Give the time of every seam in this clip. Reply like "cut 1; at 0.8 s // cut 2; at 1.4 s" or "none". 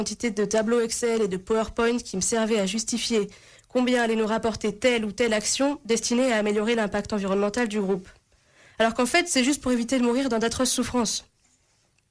none